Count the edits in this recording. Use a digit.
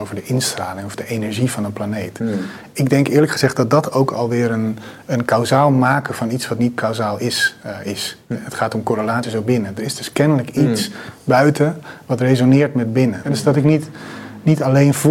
2